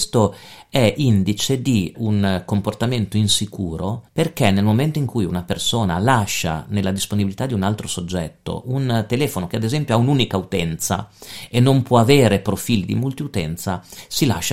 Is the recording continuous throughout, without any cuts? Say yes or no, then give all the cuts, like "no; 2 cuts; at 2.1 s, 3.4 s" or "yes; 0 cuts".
no; 2 cuts; at 1.9 s, 4.1 s